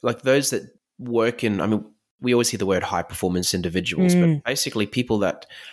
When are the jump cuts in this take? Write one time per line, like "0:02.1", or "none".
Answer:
none